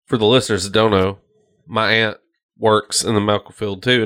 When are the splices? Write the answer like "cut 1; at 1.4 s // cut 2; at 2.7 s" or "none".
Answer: none